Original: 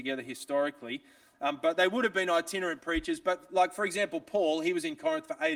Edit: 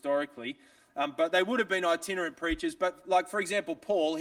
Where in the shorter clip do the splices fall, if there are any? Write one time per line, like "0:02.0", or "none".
none